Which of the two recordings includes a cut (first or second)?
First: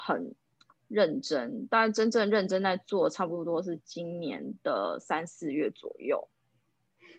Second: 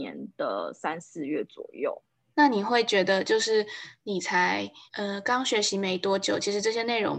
second